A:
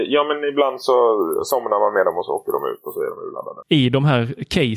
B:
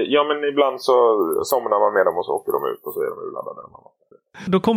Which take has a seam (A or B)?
A